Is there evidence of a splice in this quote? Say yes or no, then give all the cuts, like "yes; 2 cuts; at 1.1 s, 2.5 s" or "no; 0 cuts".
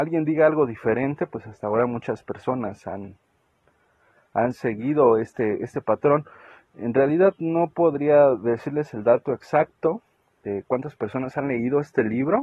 no; 0 cuts